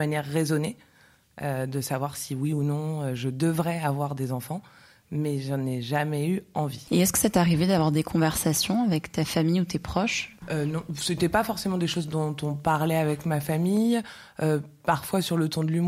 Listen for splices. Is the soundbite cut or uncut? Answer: uncut